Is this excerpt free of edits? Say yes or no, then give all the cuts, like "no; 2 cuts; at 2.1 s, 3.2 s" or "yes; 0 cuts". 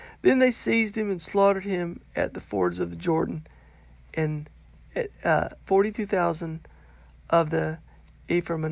no; 1 cut; at 5.7 s